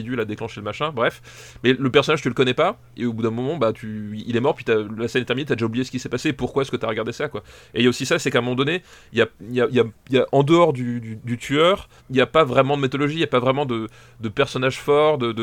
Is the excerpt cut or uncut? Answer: cut